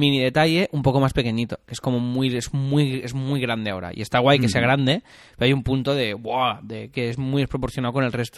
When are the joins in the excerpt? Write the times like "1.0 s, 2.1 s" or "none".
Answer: none